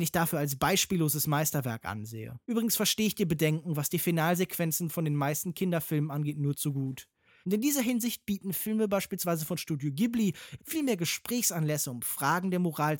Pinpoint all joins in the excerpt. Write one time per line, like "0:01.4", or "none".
0:02.4
0:07.4
0:10.6